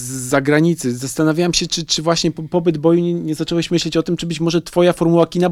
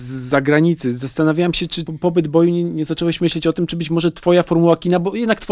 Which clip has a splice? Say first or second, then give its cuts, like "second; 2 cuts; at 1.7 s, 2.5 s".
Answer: second; 1 cut; at 1.9 s